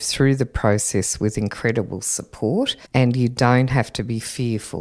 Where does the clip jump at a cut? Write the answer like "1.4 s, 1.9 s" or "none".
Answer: 2.8 s